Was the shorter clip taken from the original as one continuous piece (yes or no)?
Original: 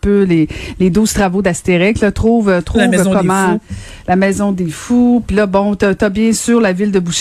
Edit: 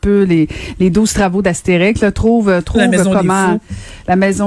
yes